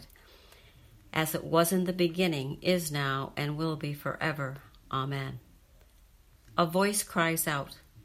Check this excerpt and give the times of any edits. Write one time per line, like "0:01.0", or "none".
none

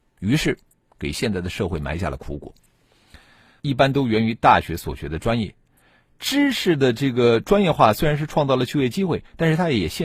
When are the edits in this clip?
0:03.6

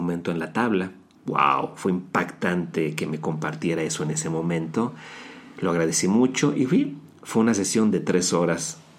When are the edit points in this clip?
0:01.2

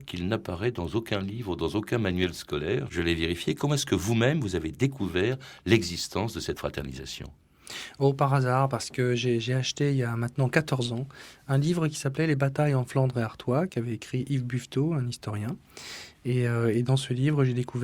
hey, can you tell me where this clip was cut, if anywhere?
0:02.9
0:16.1

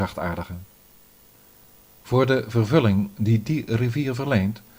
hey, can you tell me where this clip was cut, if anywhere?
none

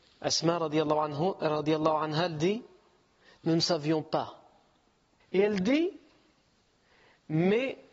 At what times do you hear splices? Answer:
0:05.2

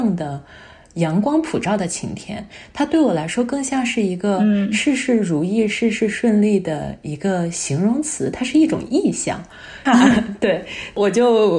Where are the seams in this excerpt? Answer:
0:09.9

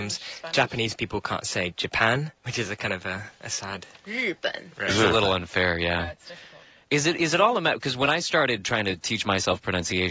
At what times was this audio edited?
0:02.4

